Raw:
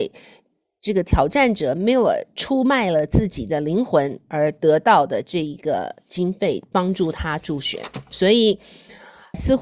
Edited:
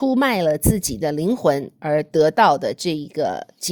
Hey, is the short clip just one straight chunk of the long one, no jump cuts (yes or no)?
yes